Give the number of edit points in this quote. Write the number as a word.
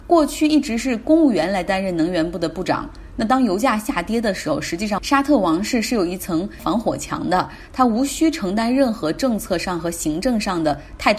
zero